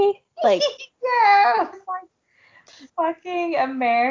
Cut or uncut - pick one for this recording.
cut